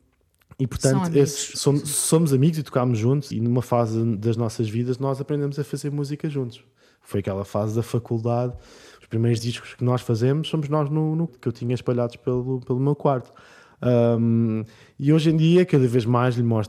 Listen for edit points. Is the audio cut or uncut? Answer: cut